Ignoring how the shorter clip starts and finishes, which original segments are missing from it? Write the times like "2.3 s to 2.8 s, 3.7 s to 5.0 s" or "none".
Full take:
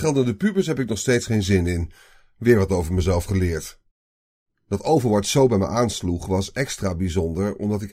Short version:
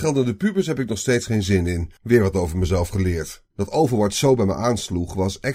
2.0 s to 2.3 s, 3.9 s to 4.6 s

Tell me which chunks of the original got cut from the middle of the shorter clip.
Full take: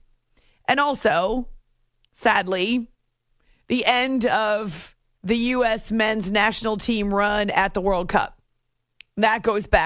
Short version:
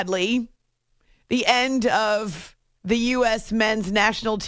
none

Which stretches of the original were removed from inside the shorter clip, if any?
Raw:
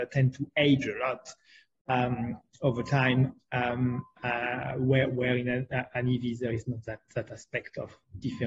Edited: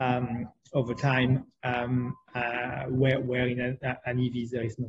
none

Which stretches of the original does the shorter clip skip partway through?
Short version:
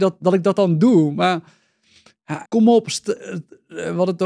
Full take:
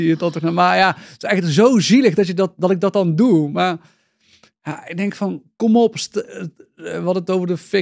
4.8 s to 5.5 s

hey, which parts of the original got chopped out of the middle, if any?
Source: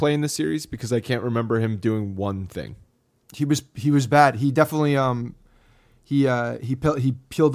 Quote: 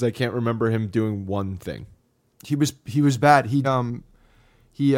4.5 s to 5.0 s

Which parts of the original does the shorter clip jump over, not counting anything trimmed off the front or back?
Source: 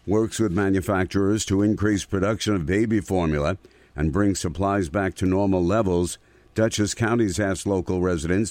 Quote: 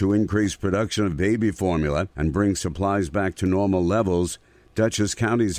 3.6 s to 3.9 s

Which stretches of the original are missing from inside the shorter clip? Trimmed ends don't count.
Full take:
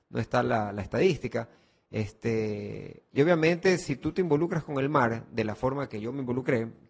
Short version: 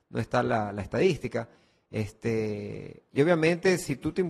none

